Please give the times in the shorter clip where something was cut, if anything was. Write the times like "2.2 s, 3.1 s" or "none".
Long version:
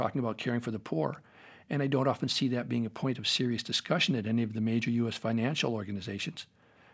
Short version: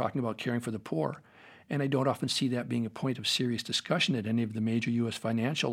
none